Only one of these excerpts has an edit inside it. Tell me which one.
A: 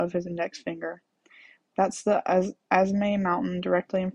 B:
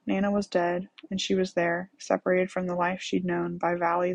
B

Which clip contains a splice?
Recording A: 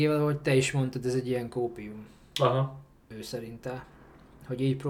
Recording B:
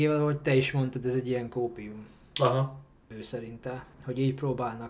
B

